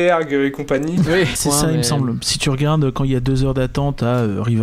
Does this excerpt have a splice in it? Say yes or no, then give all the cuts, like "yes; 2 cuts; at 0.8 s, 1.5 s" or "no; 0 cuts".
yes; 1 cut; at 1.4 s